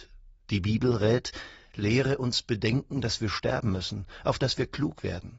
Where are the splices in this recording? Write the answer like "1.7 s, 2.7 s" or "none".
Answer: none